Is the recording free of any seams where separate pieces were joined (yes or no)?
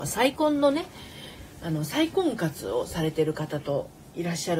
yes